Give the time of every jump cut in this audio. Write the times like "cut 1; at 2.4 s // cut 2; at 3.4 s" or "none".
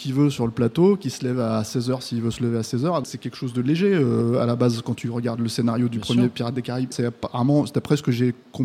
cut 1; at 3.0 s // cut 2; at 6.9 s

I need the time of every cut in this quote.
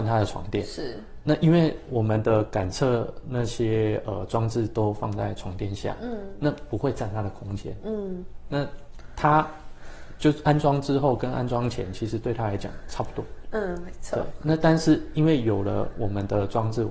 none

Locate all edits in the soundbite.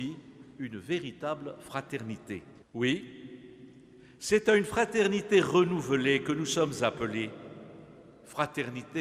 cut 1; at 2.6 s

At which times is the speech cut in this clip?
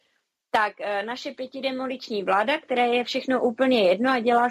none

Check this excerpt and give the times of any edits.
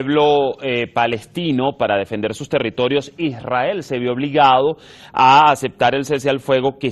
none

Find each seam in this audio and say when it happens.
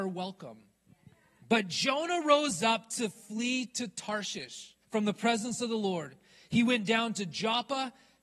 cut 1; at 1.4 s // cut 2; at 4.8 s

